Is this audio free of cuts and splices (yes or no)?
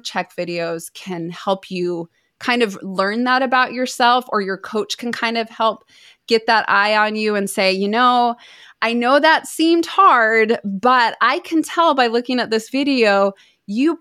yes